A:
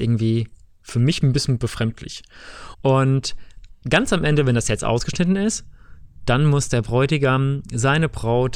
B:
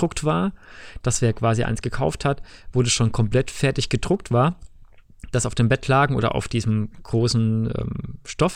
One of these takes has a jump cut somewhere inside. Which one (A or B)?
A